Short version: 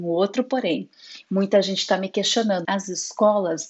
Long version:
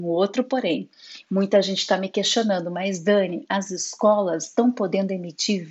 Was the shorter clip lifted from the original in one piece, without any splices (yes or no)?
no